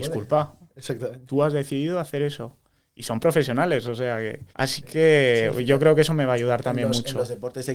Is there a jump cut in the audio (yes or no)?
yes